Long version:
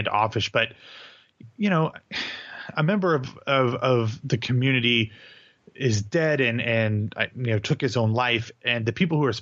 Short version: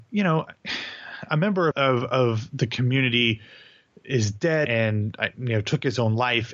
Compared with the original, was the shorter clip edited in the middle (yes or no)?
yes